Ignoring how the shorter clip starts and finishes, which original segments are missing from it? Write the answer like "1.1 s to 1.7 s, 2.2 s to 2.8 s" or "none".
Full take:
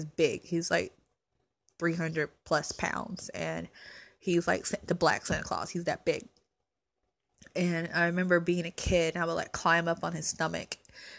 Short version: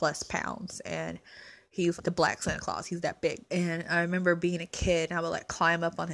4.4 s to 4.8 s, 6.3 s to 7.5 s